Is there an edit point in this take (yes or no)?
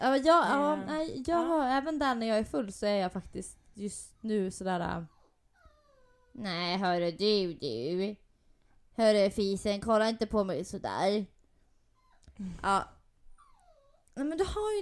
no